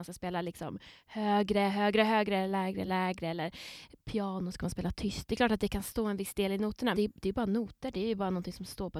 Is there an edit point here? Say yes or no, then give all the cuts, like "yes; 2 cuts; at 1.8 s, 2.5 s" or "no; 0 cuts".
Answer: yes; 2 cuts; at 2.9 s, 6.9 s